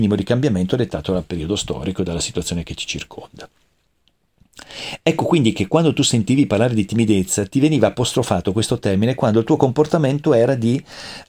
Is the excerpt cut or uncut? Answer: uncut